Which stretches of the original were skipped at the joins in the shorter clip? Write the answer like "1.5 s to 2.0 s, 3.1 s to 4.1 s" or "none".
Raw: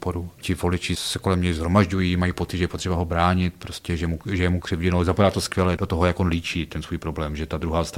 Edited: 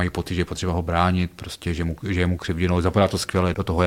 none